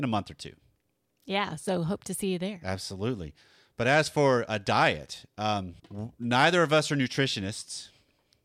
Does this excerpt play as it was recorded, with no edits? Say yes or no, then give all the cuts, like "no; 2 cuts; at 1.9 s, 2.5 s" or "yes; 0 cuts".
no; 1 cut; at 5.8 s